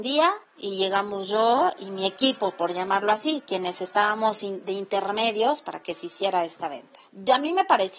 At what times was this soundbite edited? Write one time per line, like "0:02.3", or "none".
none